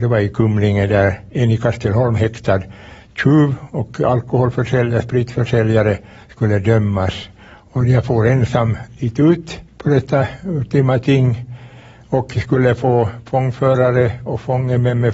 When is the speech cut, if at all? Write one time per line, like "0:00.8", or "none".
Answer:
0:09.7